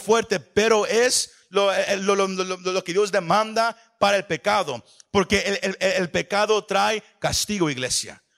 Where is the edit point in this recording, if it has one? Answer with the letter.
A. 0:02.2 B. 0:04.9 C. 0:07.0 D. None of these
D